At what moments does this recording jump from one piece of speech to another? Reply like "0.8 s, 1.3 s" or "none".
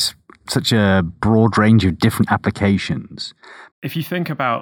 3.7 s